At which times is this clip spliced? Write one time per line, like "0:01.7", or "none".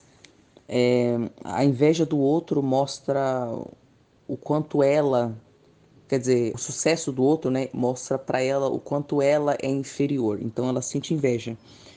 0:06.5